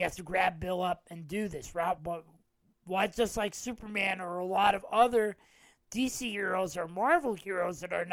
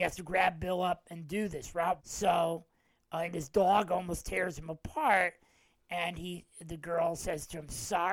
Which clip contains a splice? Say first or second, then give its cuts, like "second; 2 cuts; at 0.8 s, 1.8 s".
second; 2 cuts; at 2.0 s, 3.2 s